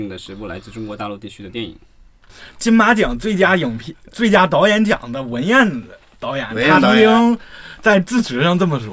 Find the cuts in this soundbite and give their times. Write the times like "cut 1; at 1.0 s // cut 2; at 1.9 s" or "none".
none